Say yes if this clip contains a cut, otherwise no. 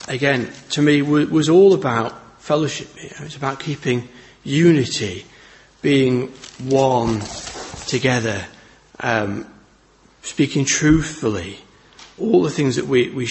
no